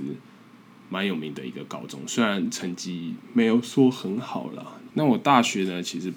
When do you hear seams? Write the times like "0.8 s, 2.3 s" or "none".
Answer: 4.9 s

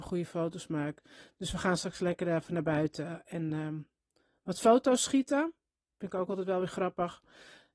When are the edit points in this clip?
none

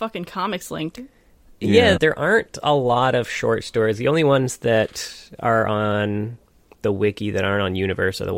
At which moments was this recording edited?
2.0 s

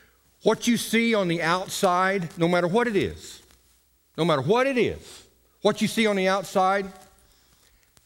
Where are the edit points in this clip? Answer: none

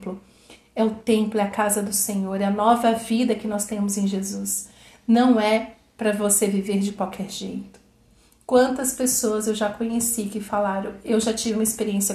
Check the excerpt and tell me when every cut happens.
none

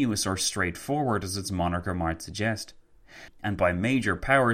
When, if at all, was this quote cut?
3.3 s

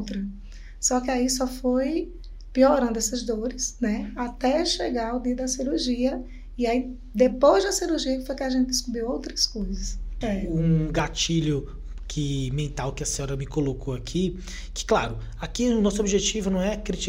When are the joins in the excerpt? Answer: 10.2 s

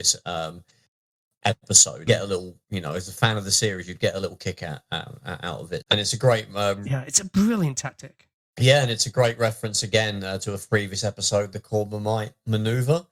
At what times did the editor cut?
2.1 s, 5.8 s

